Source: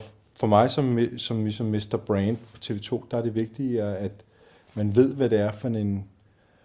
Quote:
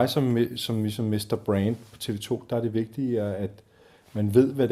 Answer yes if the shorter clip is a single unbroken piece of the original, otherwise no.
yes